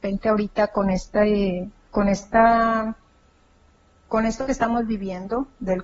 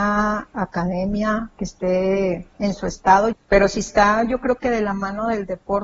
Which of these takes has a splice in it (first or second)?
second